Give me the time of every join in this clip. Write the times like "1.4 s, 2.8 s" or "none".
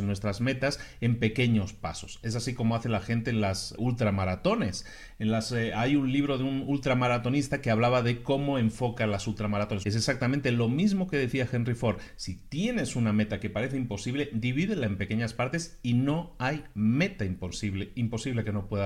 3.8 s, 9.8 s